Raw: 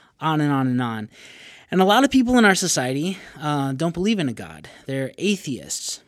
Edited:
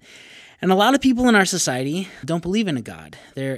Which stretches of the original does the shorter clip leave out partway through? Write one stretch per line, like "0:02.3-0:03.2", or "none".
0:03.3-0:03.7